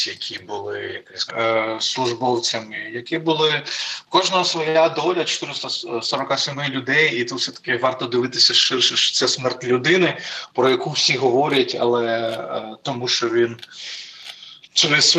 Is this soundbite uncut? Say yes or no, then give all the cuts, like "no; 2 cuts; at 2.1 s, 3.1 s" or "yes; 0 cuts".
no; 1 cut; at 1.3 s